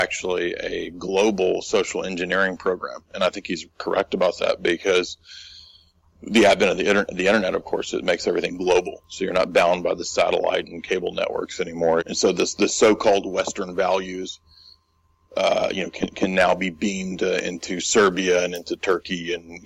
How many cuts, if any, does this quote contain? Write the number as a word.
one